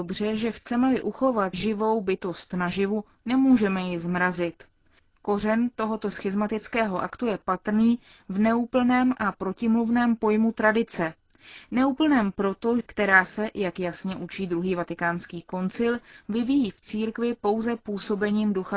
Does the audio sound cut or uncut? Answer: cut